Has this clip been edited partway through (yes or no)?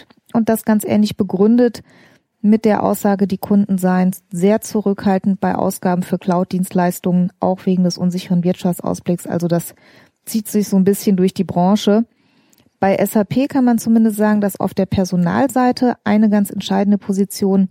no